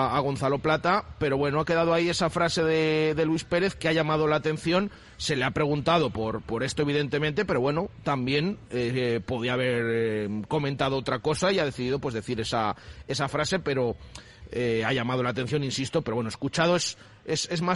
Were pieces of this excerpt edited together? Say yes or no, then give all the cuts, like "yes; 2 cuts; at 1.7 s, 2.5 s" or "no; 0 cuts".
no; 0 cuts